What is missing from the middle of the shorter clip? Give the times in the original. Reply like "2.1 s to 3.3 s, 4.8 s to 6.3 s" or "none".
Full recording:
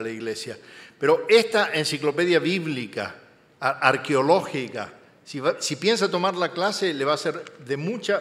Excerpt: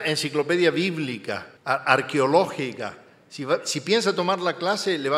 3.3 s to 3.5 s